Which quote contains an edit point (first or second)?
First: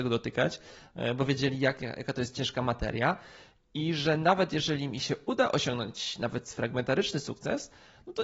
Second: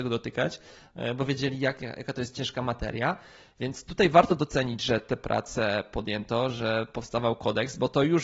second